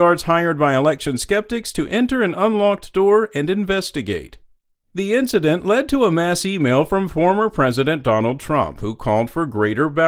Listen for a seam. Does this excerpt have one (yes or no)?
no